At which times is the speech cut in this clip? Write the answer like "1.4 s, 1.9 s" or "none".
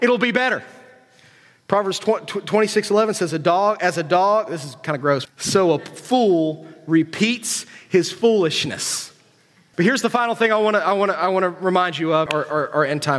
5.3 s, 9.7 s, 12.3 s